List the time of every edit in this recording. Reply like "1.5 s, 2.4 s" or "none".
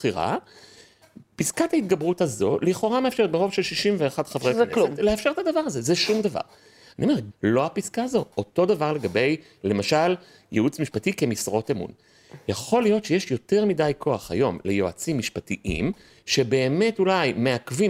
7.3 s